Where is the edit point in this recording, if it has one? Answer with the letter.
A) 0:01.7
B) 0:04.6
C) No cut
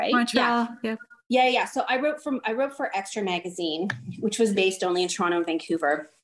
B